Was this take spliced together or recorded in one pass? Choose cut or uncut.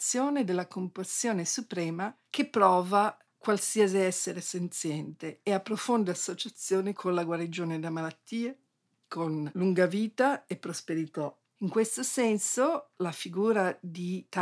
cut